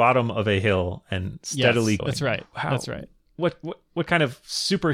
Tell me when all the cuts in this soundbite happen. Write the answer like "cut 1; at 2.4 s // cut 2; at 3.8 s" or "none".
cut 1; at 2.0 s